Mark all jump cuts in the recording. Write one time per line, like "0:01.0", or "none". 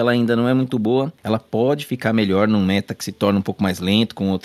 none